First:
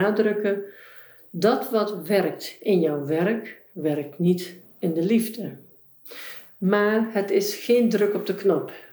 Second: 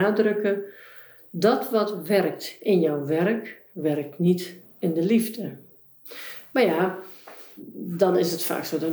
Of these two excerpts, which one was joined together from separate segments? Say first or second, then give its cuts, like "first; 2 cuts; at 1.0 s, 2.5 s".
first; 1 cut; at 6.5 s